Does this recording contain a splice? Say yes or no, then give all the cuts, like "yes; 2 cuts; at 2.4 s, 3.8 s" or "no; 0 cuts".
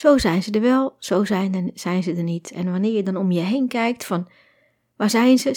no; 0 cuts